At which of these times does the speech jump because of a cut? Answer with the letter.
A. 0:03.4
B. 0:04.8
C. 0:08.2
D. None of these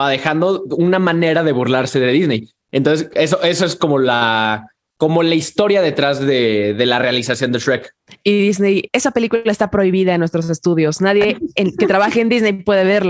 D